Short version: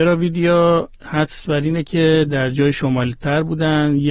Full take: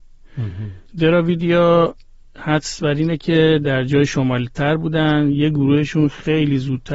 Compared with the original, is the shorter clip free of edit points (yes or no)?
no